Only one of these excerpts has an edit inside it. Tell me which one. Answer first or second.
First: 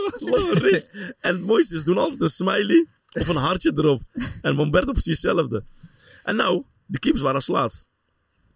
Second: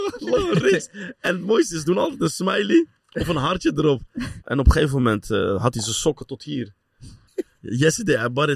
second